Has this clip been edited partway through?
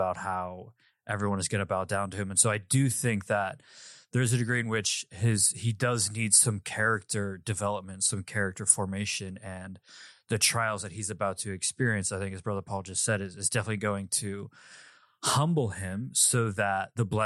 no; 0 cuts

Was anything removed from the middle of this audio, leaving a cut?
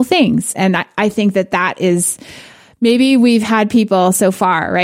no; 0 cuts

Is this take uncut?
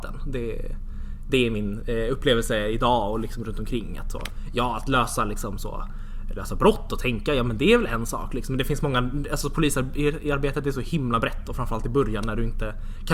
yes; 0 cuts

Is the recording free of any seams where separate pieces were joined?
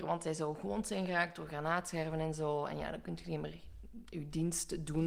yes; 0 cuts

